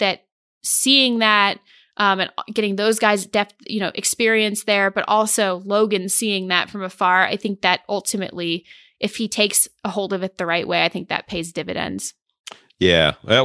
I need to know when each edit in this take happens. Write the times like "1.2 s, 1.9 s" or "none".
none